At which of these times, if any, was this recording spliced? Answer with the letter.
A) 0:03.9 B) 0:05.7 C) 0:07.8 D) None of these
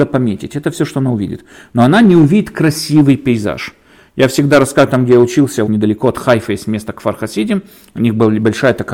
B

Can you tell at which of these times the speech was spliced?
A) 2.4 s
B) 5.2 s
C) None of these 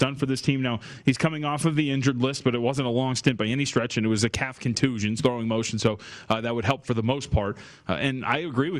B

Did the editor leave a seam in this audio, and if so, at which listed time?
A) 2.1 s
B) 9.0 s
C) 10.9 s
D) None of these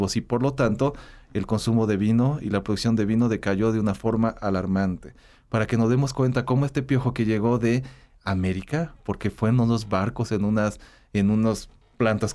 D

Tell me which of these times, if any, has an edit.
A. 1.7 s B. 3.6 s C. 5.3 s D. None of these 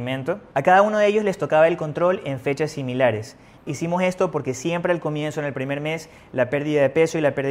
B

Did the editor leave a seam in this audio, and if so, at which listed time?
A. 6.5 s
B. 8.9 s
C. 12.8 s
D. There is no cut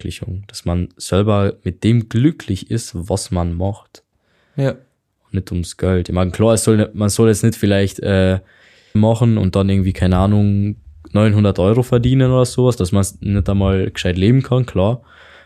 B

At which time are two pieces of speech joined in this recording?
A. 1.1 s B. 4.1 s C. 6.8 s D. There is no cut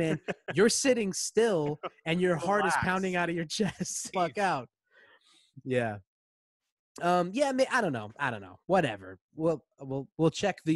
B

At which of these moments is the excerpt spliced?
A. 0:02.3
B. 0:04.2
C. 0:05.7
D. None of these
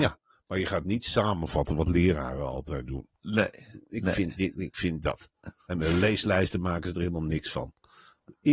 C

